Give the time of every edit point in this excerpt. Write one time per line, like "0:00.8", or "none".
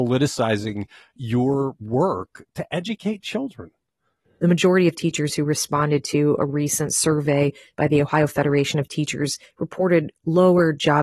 0:04.2